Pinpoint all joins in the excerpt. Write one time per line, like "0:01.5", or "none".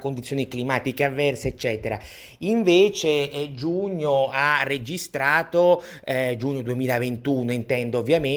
none